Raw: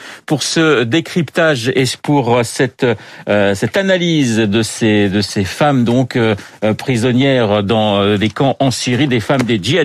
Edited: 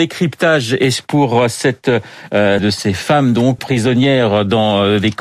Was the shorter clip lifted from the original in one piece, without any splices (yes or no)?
no